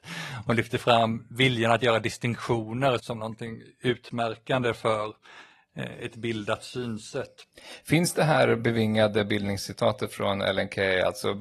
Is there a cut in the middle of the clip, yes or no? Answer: yes